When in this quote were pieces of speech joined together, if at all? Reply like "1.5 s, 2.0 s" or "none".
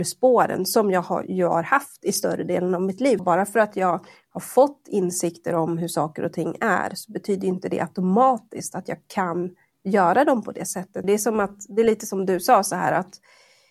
3.2 s, 11.0 s